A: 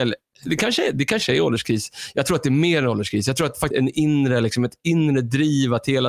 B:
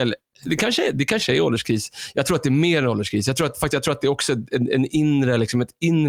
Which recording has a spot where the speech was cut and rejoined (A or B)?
A